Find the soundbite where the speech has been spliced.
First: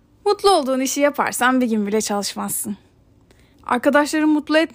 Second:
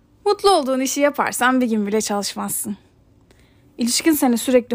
first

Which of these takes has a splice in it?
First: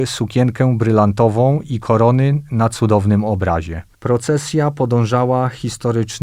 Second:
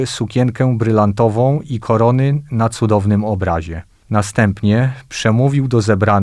first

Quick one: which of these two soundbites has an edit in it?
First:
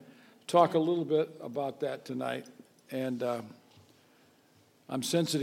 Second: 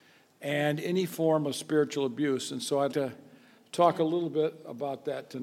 second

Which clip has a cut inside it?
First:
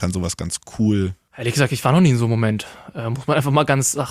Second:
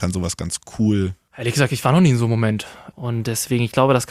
second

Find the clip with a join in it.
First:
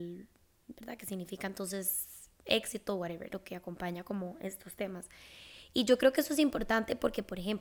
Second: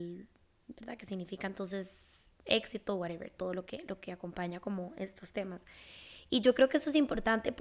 first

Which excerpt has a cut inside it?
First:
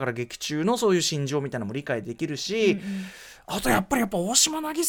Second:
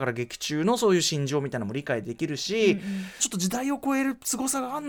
second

